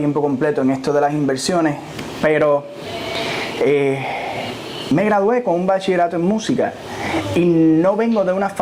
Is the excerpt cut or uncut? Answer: uncut